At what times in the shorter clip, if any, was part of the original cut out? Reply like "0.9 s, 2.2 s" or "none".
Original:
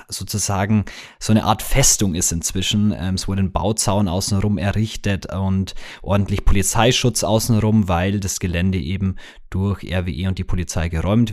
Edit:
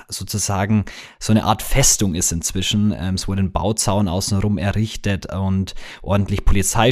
none